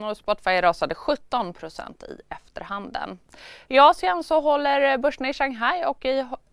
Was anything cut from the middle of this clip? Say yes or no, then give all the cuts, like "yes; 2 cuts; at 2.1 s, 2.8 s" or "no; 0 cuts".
yes; 1 cut; at 3.7 s